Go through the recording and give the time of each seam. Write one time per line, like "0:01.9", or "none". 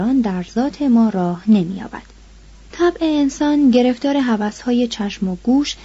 0:02.7